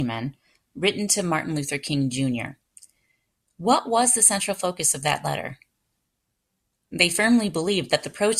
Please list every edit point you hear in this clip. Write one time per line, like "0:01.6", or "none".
none